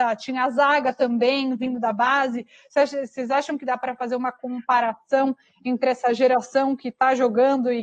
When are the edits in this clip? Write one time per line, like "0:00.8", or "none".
none